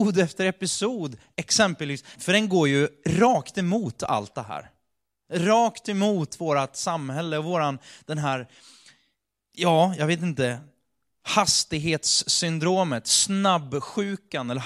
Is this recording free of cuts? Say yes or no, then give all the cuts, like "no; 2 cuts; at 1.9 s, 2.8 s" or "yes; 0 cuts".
no; 1 cut; at 2.1 s